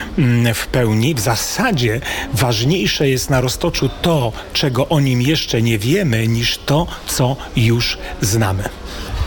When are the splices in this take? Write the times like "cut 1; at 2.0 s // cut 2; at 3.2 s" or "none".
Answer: none